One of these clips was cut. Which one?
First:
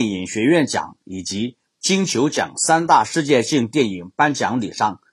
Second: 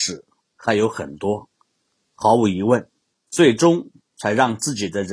second; 1 cut; at 3.1 s

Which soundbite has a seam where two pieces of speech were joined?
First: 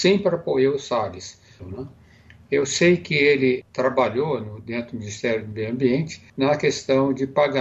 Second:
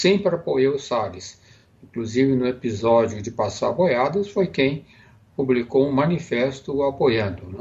first; 3 cuts; at 1.6 s, 3.6 s, 6.3 s

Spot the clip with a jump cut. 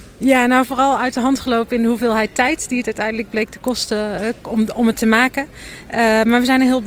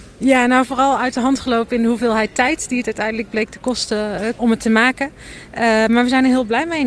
second; 1 cut; at 4.4 s

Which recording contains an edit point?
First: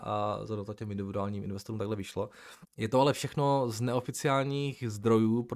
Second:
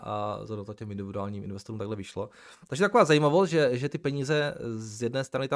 first; 1 cut; at 2.6 s

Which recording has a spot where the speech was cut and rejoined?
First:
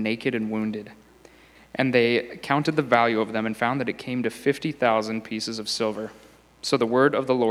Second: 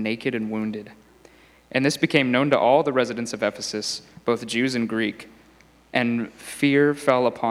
first; 1 cut; at 1.6 s

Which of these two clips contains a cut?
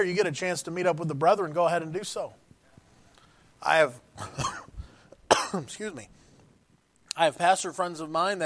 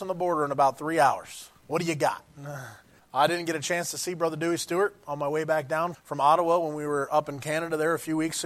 second; 3 cuts; at 1.6 s, 3.0 s, 5.9 s

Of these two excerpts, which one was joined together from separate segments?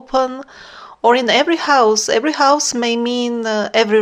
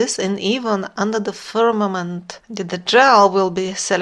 second; 1 cut; at 2.4 s

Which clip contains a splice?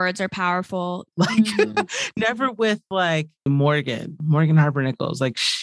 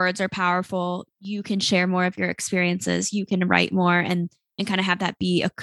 first; 2 cuts; at 1.1 s, 3.5 s

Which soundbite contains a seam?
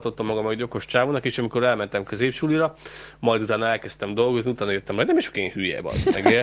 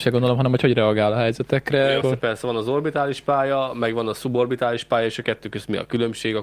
second; 1 cut; at 2.0 s

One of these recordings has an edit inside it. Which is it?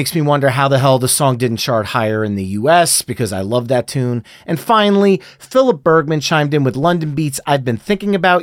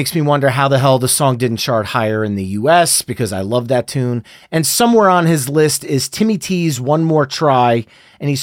second; 1 cut; at 4.4 s

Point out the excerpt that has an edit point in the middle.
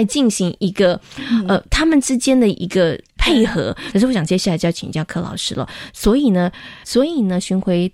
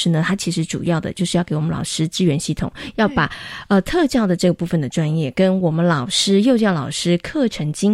first; 2 cuts; at 3.9 s, 6.8 s

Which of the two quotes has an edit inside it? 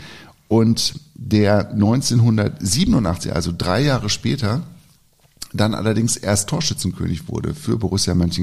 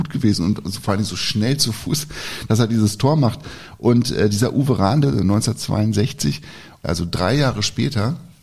second; 2 cuts; at 5.0 s, 6.8 s

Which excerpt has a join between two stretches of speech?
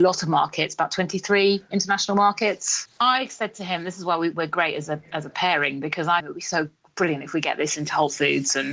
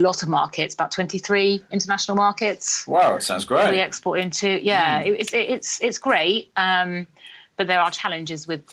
first; 2 cuts; at 2.9 s, 6.2 s

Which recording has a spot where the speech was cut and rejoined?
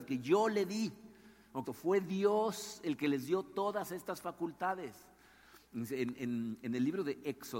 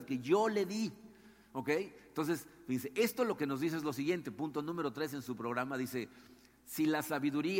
first; 1 cut; at 1.6 s

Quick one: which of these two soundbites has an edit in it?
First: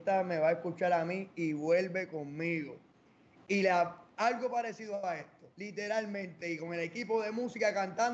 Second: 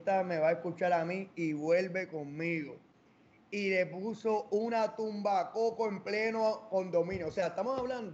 first; 2 cuts; at 3.4 s, 5.5 s

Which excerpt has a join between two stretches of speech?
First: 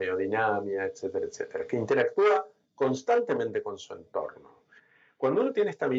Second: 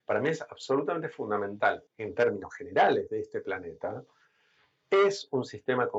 second; 1 cut; at 1.9 s

